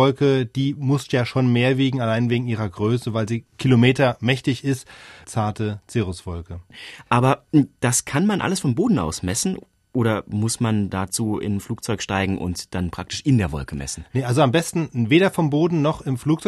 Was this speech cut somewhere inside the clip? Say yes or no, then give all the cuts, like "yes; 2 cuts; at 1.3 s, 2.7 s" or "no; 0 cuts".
yes; 1 cut; at 5.2 s